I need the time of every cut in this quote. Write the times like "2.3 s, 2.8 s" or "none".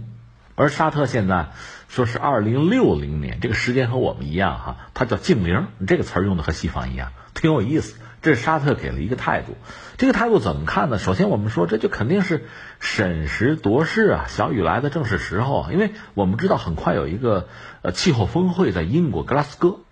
none